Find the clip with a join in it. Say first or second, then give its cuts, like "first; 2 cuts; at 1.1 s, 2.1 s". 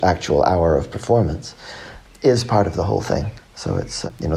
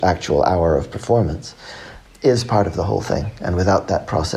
first; 1 cut; at 3.4 s